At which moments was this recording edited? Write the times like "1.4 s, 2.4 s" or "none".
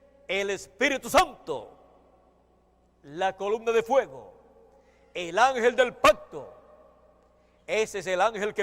none